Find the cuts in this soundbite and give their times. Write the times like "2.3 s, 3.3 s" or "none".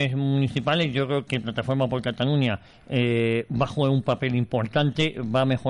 1.3 s

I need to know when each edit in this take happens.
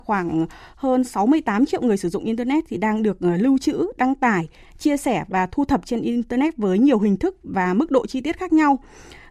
none

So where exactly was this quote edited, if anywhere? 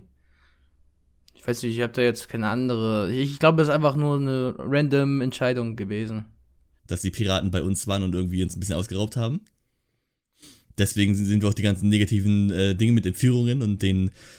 6.8 s

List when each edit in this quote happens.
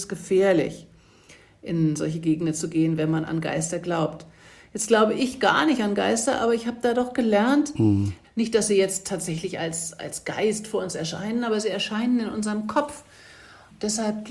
8.2 s

